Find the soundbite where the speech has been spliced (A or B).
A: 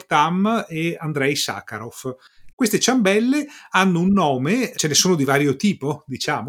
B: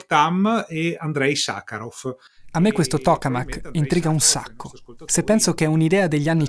A